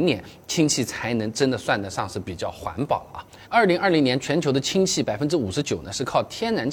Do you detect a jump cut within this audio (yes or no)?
yes